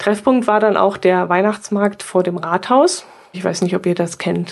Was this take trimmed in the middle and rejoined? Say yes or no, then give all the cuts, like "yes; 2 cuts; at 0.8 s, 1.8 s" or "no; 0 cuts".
yes; 1 cut; at 3.3 s